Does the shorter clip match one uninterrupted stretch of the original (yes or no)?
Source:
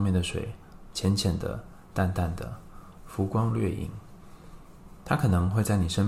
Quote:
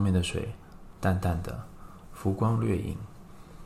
no